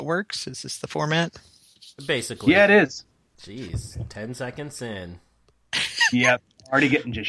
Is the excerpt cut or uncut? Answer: cut